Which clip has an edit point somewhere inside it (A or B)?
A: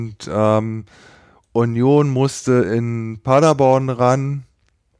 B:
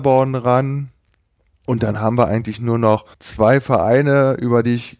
B